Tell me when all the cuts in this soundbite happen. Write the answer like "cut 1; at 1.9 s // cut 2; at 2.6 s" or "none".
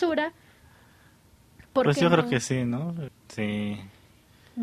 cut 1; at 3.1 s